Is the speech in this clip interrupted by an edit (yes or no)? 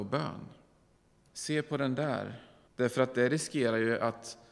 yes